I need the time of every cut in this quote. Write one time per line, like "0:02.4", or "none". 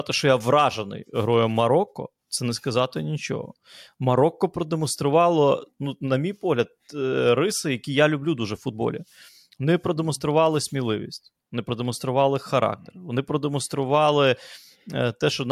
none